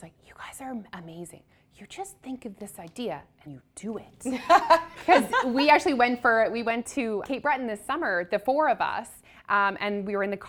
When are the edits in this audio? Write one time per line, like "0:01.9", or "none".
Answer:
0:03.5
0:05.0
0:07.2